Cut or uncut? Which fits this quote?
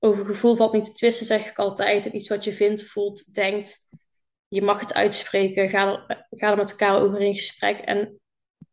uncut